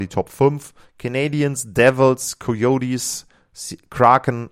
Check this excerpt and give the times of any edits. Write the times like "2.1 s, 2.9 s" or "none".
none